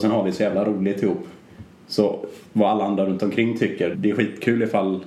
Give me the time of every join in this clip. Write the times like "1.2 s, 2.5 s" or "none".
3.9 s